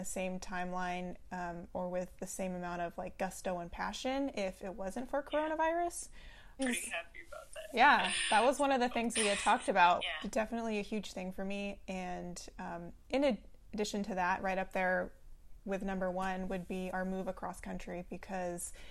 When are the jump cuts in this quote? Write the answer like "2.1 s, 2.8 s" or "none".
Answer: 6.6 s, 10.0 s